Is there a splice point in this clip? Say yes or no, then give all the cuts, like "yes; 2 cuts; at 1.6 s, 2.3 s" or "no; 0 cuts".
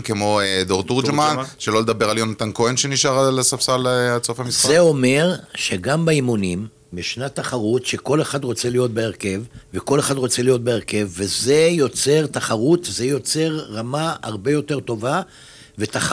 yes; 2 cuts; at 6.9 s, 9.6 s